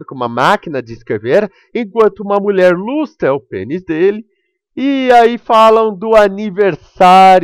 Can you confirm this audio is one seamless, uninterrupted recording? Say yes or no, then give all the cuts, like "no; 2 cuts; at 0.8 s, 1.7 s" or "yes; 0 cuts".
yes; 0 cuts